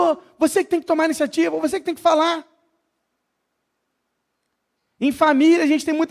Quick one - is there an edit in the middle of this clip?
no; 0 cuts

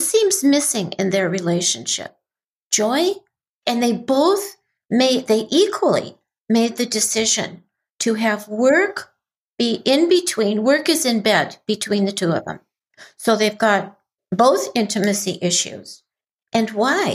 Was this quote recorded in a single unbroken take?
yes; 0 cuts

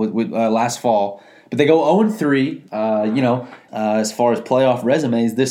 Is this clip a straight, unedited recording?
no; 1 cut; at 3.7 s

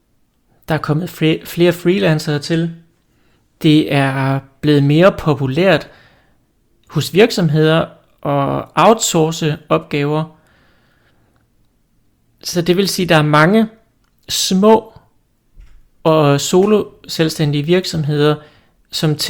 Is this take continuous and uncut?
yes; 0 cuts

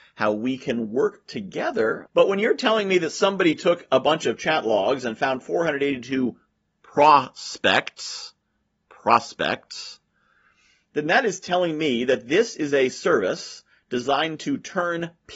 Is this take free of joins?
no; 1 cut; at 2.1 s

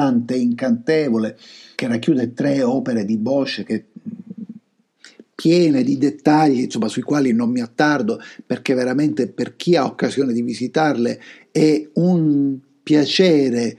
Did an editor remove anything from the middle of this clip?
yes; 1 cut; at 1.7 s

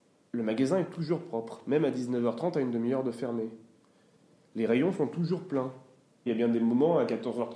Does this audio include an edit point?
yes; 1 cut; at 6.3 s

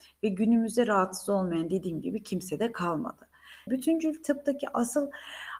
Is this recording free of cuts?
no; 1 cut; at 3.7 s

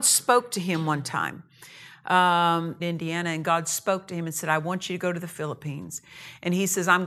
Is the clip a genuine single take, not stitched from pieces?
no; 1 cut; at 2.8 s

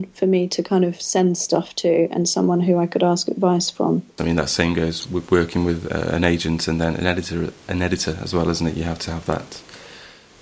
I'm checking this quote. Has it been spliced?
yes; 1 cut; at 4.2 s

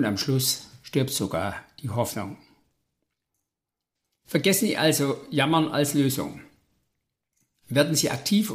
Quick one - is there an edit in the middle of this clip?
no; 0 cuts

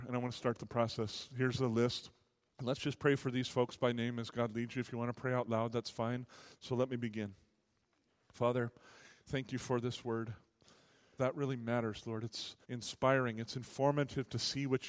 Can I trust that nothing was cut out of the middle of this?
no; 3 cuts; at 6.5 s, 11.2 s, 12.6 s

